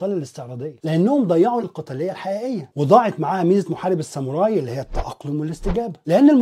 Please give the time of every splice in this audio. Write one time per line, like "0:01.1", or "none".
0:01.6